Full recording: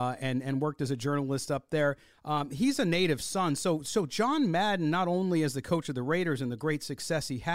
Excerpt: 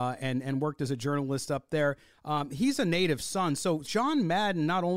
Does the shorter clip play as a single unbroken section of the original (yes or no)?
no